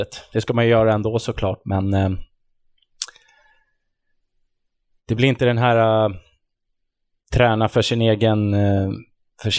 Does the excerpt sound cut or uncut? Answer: uncut